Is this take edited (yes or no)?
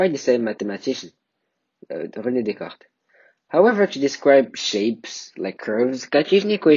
no